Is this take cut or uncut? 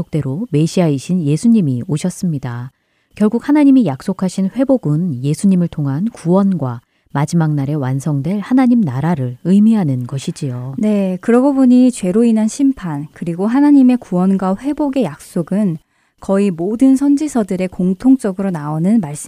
uncut